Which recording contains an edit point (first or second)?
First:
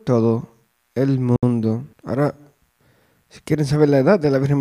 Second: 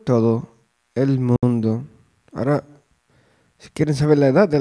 first